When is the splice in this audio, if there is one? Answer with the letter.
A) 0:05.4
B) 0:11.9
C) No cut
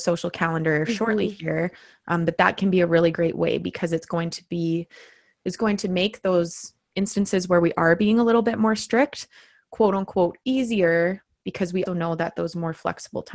B